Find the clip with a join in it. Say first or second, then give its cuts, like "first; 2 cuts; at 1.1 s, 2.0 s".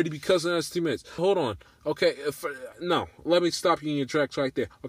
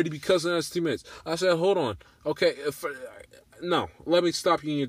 first; 2 cuts; at 1.2 s, 2.7 s